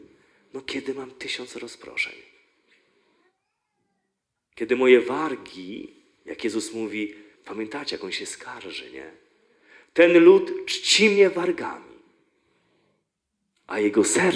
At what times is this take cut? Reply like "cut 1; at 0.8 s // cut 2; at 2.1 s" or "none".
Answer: cut 1; at 7.3 s